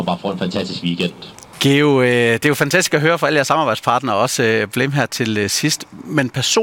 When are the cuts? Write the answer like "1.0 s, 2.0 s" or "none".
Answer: 1.5 s

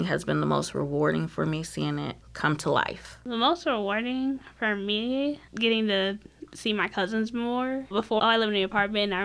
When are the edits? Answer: 8.2 s

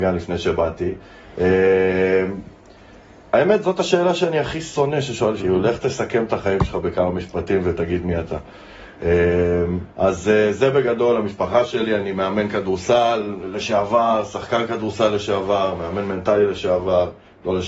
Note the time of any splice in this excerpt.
5.4 s, 9.9 s

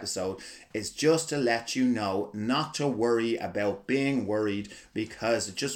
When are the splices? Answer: none

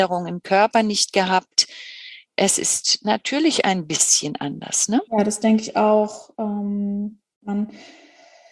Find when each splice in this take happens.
5.1 s

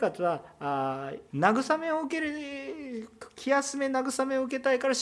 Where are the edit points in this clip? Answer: 1.3 s

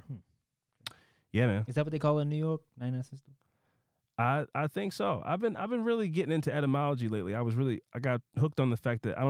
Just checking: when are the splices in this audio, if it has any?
none

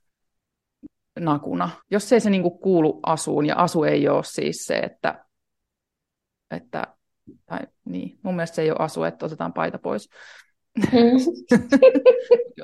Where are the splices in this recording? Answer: 1.8 s

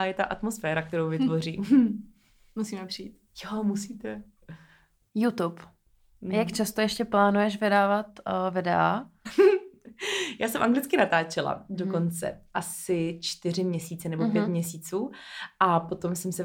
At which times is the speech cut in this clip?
9.3 s

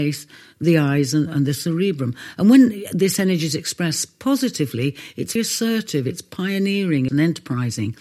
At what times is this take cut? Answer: 5.4 s, 7.1 s

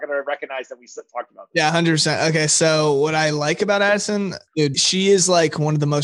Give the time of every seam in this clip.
4.7 s

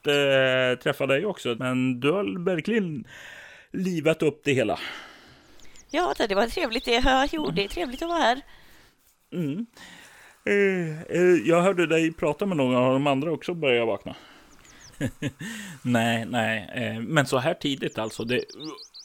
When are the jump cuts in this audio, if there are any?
1.5 s, 14.9 s

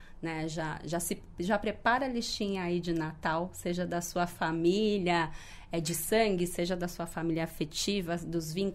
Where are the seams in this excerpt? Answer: none

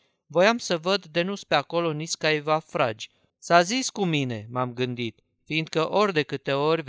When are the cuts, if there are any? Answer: 3.3 s

